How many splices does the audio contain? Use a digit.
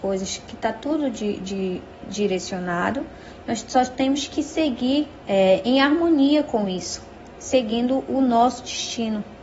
1